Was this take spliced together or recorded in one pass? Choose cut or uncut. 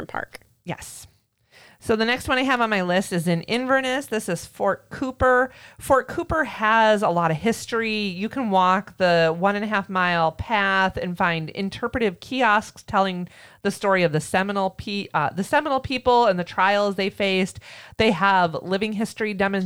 uncut